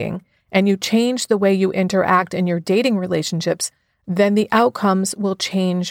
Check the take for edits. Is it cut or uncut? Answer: uncut